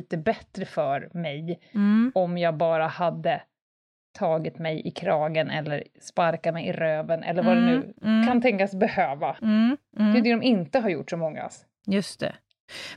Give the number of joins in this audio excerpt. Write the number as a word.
one